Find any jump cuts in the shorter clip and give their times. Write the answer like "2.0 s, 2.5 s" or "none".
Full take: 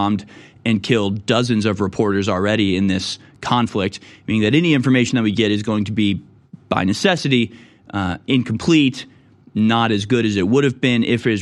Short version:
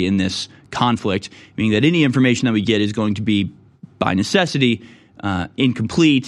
none